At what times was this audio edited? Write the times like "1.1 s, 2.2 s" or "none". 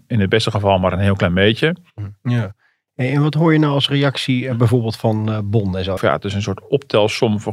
2.2 s, 6.0 s

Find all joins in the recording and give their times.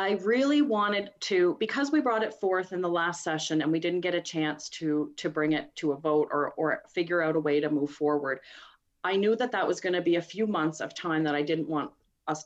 none

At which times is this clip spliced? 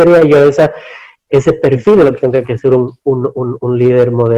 none

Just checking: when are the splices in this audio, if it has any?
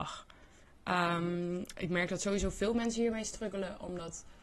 none

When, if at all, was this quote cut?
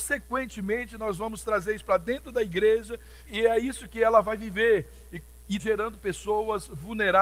3.3 s, 5.6 s

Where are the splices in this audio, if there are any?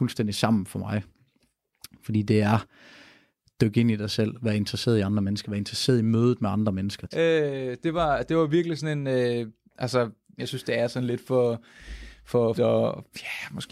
7.1 s, 10.4 s, 12.5 s

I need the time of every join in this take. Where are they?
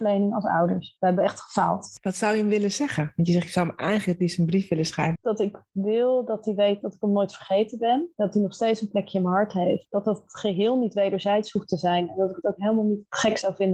5.2 s

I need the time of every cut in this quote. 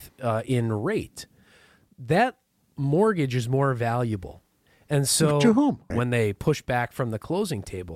5.9 s

